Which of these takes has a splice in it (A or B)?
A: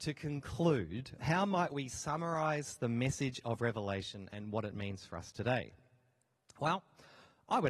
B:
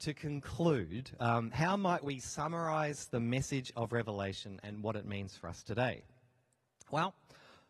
A